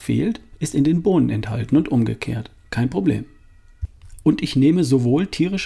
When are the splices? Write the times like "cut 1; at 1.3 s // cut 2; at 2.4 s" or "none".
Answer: cut 1; at 4.2 s